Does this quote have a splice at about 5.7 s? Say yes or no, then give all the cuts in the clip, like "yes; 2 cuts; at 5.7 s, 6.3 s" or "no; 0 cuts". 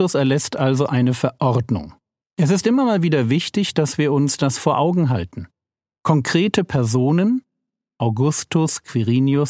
no; 1 cut; at 2.2 s